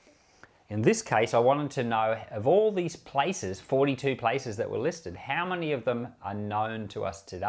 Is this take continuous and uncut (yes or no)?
yes